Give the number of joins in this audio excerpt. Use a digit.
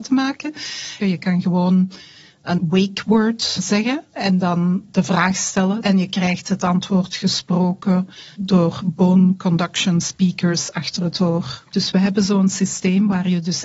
3